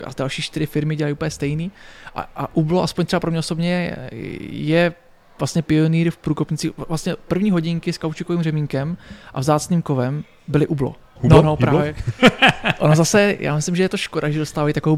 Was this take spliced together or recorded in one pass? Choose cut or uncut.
cut